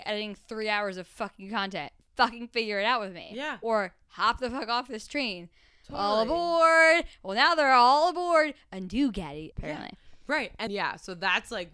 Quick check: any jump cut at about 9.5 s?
yes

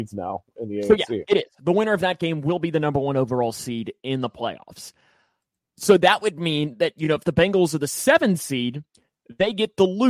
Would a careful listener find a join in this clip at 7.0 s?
no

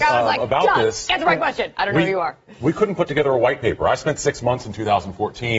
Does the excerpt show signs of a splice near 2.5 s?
no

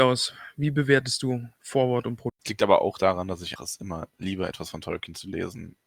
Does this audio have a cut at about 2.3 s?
yes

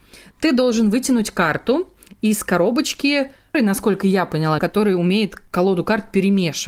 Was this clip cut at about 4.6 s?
yes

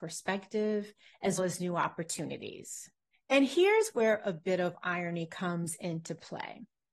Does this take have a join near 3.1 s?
yes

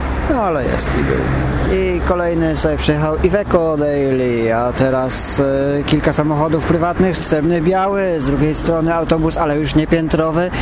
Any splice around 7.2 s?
yes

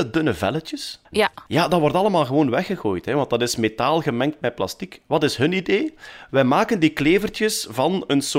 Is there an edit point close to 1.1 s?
yes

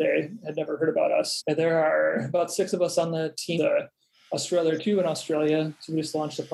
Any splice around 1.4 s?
yes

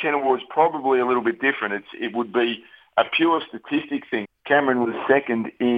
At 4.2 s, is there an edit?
yes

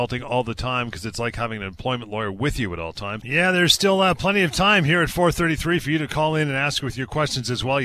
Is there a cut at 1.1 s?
no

